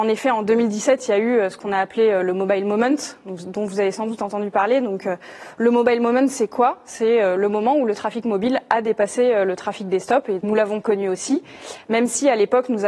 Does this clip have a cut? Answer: yes; 1 cut; at 10.4 s

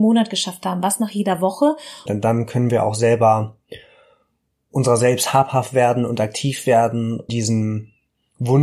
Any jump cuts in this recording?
yes; 2 cuts; at 2.1 s, 7.3 s

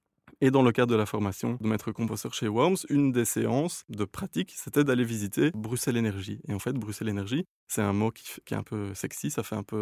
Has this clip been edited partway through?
no; 0 cuts

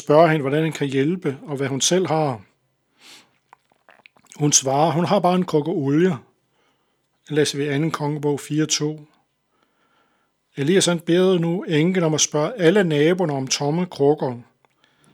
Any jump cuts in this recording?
no; 0 cuts

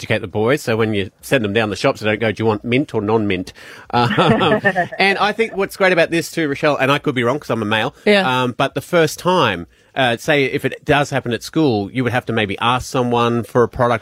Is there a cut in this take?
no; 0 cuts

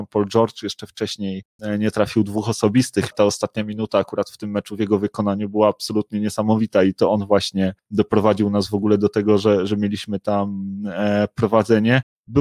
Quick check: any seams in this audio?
yes; 1 cut; at 3.1 s

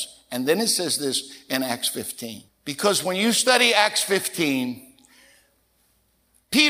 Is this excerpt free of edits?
no; 1 cut; at 2.5 s

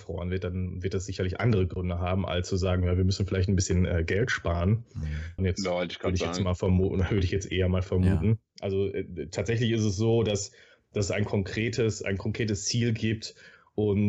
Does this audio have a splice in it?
yes; 2 cuts; at 5.4 s, 8.5 s

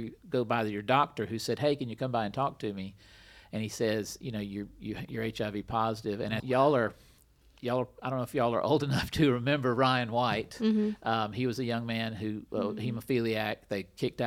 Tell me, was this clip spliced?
yes; 1 cut; at 6.4 s

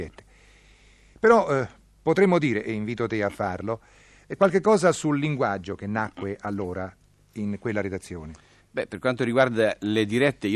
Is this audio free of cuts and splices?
yes; 0 cuts

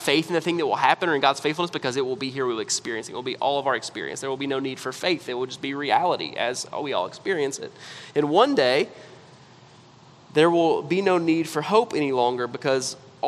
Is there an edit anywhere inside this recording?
no; 0 cuts

